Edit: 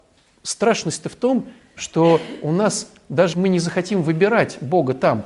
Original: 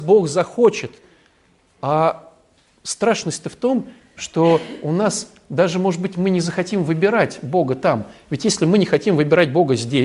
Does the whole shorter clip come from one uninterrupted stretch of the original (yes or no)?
no